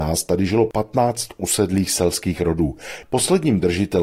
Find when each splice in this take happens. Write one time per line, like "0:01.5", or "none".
0:03.0

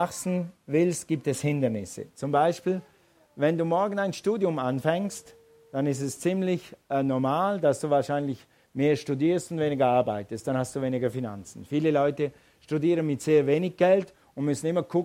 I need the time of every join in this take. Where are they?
none

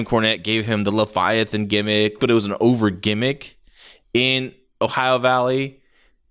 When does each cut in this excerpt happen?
0:02.2

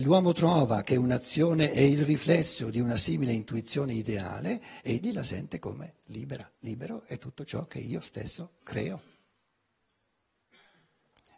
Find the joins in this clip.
0:06.6

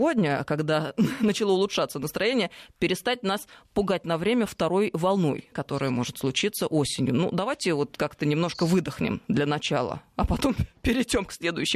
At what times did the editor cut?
0:05.5

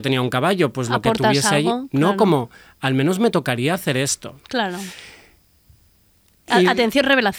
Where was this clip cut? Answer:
none

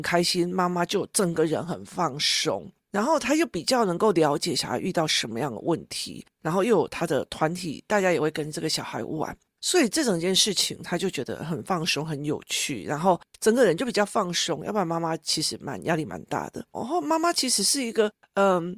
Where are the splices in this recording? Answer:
0:16.7

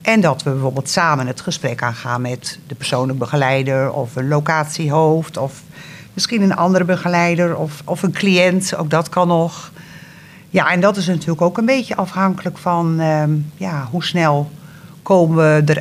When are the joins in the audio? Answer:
none

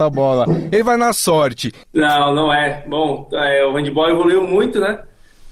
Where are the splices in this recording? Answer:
0:01.8

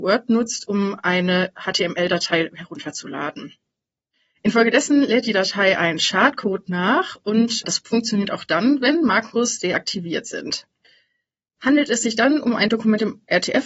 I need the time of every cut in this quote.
none

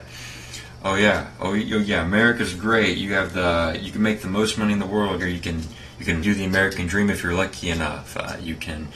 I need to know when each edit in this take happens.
0:05.2
0:06.2

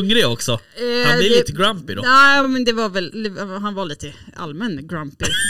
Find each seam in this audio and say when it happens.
none

